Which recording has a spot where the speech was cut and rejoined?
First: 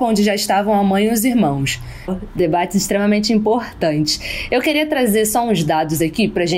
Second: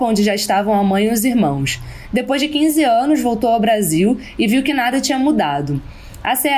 first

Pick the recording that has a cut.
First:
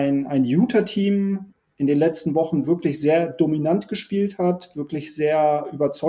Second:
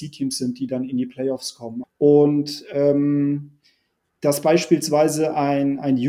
second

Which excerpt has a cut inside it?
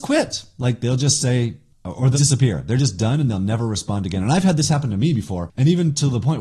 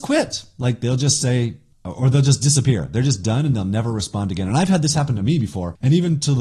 first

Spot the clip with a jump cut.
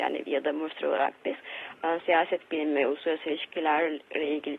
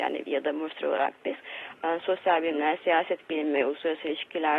first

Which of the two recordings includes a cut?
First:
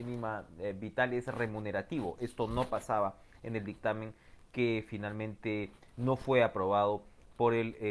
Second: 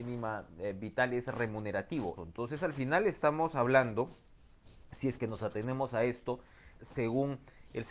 second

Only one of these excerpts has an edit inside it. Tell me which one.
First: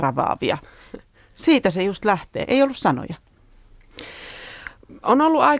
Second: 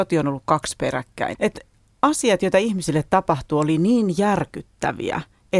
second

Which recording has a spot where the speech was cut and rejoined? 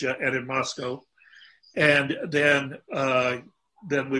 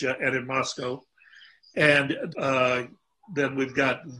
second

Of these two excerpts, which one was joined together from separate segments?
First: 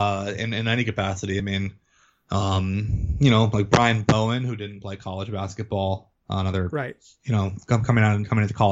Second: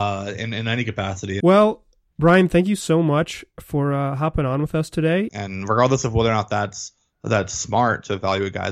second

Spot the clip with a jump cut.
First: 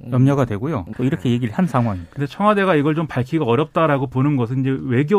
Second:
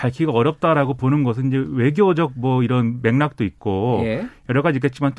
first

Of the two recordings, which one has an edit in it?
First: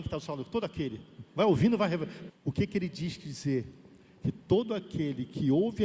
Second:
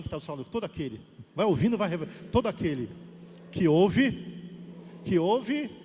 first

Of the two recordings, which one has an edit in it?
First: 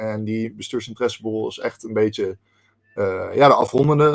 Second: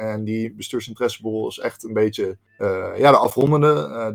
second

